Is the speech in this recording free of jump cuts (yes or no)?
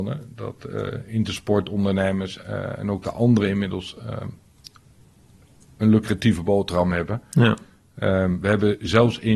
yes